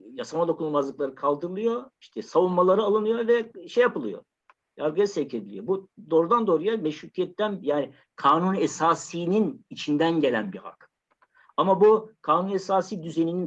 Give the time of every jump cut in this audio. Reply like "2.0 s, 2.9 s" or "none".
none